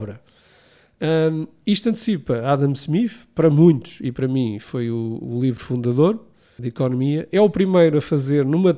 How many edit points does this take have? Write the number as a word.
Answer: one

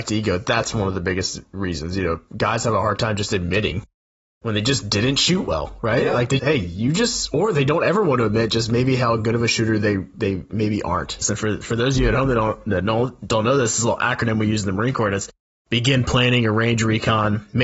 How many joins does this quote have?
two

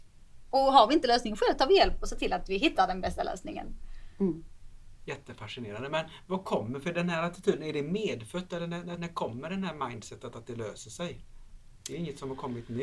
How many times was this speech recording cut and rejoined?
one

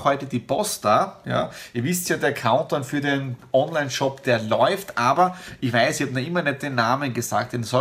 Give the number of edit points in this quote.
zero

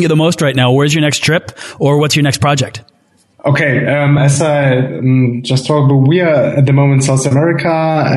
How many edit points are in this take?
zero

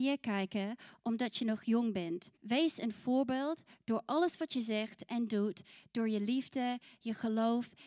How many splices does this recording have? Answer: one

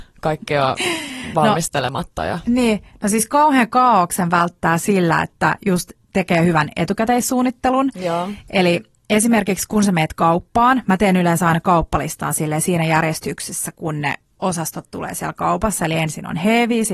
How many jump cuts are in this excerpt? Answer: zero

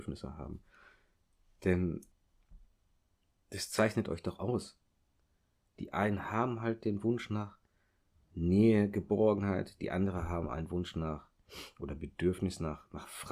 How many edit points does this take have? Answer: zero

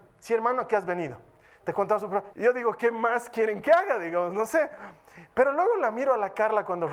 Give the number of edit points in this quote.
one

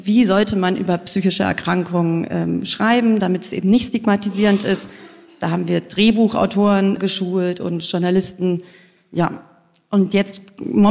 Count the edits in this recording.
one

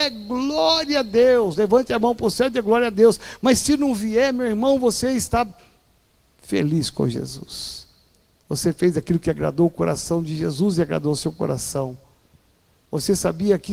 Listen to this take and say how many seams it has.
zero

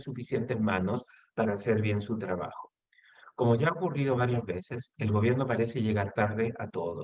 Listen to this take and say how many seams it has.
zero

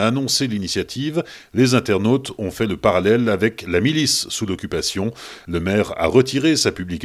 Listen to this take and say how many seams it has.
zero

